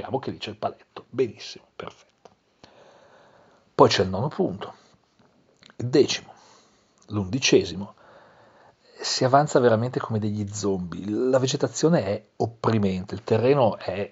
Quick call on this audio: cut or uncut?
uncut